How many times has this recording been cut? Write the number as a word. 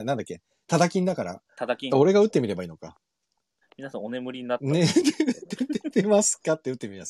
one